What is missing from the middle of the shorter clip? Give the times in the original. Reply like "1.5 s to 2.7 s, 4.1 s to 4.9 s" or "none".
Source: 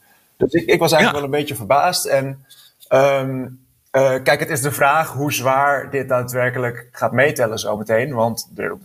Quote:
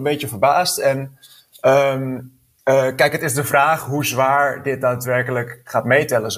none